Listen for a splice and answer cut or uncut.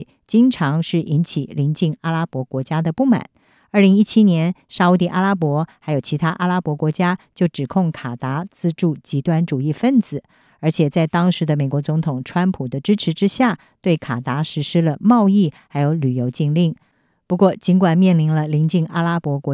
uncut